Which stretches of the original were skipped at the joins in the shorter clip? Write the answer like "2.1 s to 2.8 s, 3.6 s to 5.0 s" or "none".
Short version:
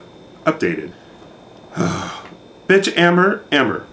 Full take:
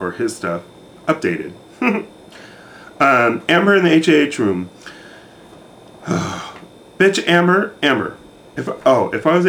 1.5 s to 5.2 s